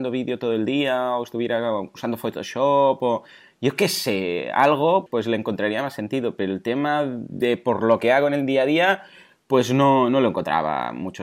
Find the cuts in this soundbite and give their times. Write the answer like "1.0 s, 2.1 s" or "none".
5.1 s